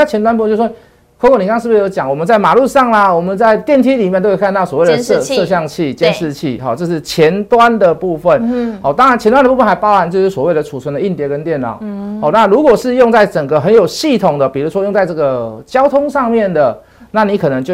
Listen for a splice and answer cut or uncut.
uncut